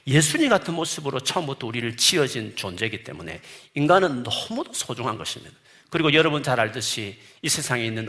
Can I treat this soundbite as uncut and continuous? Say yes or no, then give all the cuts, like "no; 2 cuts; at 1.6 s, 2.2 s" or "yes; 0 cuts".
yes; 0 cuts